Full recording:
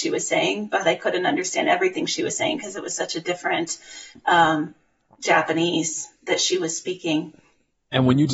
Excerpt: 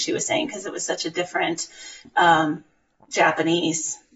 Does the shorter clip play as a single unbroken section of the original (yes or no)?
yes